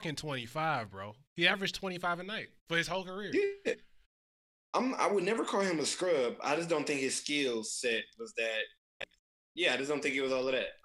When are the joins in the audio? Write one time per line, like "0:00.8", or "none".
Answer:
0:02.6